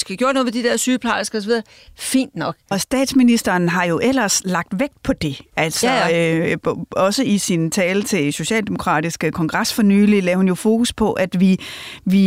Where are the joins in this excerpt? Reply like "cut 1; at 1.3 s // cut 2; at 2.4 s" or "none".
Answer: cut 1; at 2.7 s